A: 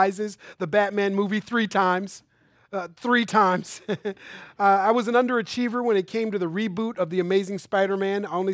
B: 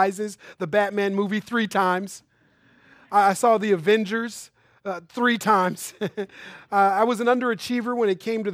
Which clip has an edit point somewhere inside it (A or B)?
A